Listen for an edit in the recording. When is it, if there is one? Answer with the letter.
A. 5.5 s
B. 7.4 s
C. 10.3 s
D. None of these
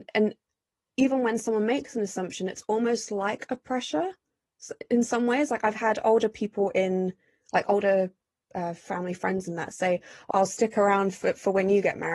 C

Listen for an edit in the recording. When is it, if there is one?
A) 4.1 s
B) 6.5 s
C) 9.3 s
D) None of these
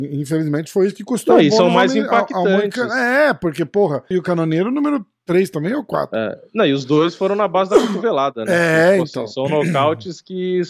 A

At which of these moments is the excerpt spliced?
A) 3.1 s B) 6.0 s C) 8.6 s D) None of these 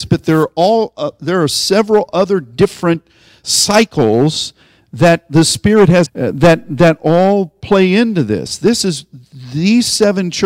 B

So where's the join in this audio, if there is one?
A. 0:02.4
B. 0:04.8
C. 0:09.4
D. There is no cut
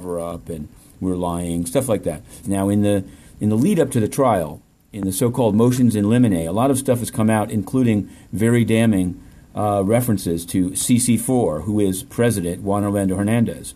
A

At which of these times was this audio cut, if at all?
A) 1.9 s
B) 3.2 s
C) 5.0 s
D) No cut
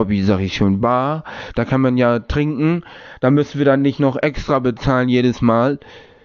D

